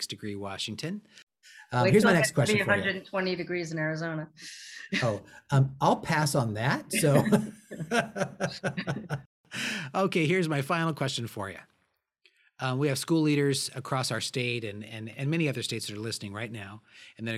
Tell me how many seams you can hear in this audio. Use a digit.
1